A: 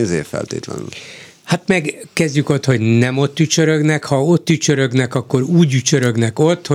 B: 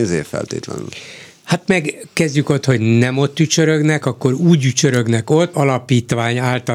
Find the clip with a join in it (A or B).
B